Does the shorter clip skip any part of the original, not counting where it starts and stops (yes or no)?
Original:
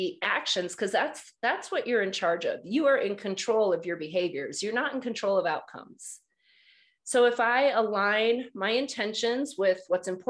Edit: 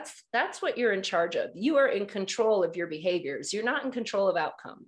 no